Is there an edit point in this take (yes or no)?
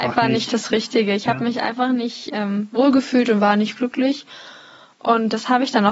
no